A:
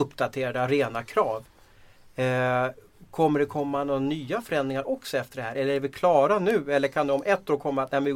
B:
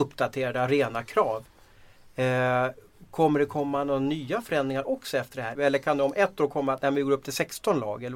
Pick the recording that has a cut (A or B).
B